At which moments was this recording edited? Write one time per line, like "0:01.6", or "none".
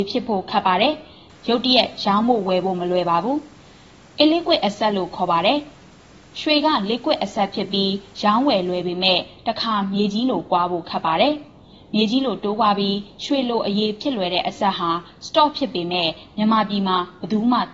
0:05.8